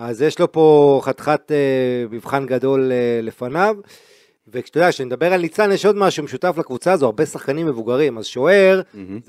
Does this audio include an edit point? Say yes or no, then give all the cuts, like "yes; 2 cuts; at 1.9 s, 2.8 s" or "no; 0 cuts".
no; 0 cuts